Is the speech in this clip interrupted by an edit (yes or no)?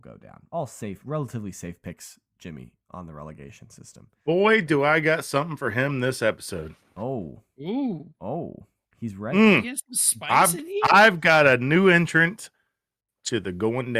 no